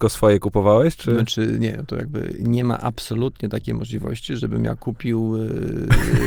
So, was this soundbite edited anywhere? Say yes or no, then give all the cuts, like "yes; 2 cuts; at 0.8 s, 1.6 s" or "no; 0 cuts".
no; 0 cuts